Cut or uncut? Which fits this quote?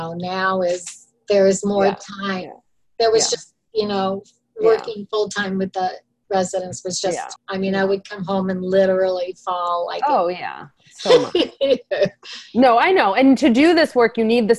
cut